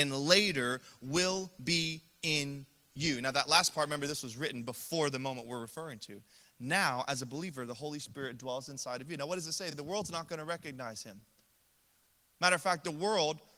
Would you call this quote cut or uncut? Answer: uncut